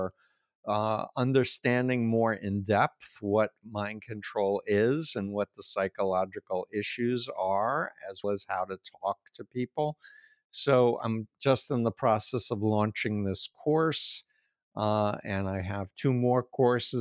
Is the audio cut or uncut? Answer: cut